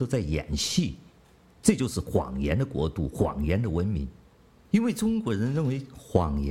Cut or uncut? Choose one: uncut